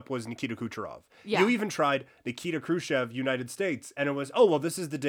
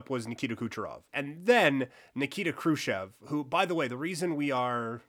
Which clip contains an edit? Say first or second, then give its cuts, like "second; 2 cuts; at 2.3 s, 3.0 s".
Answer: second; 1 cut; at 1.1 s